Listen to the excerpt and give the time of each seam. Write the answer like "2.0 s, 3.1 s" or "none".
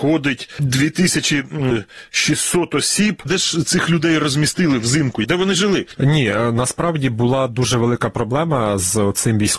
3.2 s, 5.9 s